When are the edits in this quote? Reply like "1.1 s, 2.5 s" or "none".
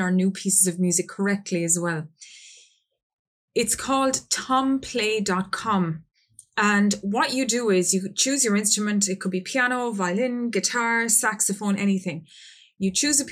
none